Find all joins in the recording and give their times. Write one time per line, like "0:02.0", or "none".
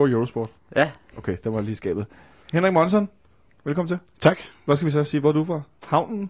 none